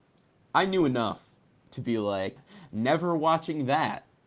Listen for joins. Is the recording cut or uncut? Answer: cut